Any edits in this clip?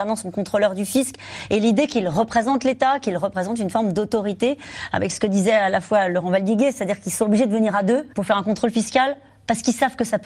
yes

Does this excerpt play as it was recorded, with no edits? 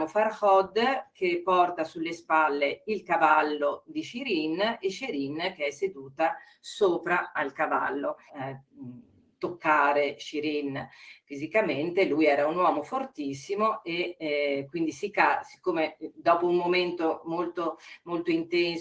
no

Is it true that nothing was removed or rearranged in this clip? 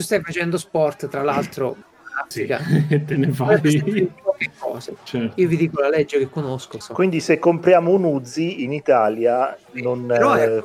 no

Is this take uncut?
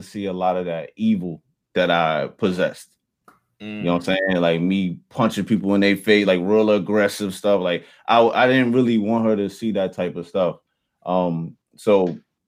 yes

